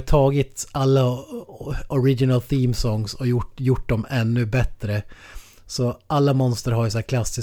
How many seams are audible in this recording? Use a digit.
0